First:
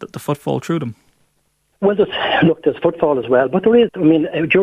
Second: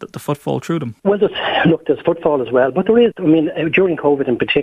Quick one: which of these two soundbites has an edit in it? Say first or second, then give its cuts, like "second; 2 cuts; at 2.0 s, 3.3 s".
second; 1 cut; at 1.0 s